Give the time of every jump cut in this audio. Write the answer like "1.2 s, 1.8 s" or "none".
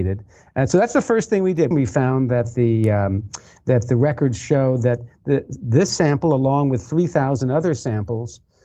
1.7 s